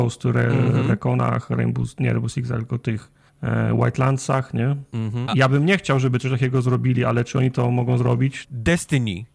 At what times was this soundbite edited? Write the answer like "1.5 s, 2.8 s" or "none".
3.3 s, 5.3 s, 8.4 s